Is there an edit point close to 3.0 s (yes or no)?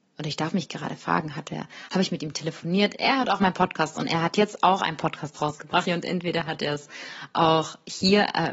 no